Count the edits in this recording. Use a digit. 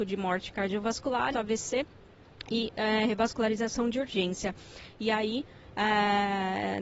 1